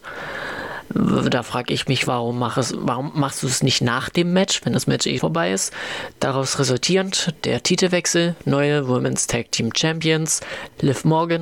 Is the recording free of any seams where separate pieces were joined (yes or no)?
no